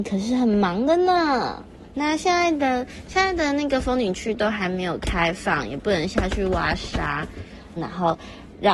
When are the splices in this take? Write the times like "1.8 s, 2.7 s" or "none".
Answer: 1.9 s, 7.8 s